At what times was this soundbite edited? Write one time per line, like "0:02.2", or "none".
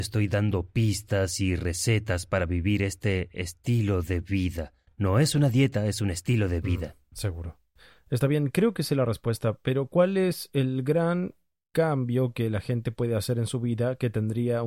none